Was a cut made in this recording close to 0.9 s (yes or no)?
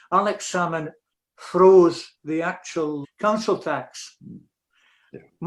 no